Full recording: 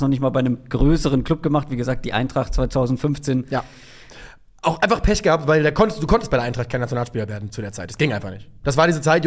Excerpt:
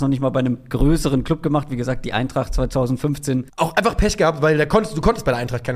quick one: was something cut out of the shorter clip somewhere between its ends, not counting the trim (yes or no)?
yes